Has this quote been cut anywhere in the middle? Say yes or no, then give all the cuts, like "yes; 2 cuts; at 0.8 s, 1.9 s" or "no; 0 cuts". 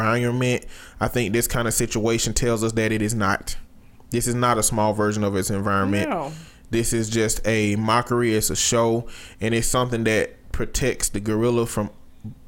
no; 0 cuts